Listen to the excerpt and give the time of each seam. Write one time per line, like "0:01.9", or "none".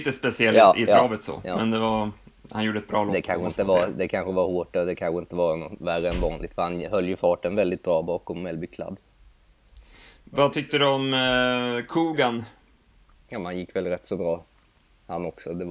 none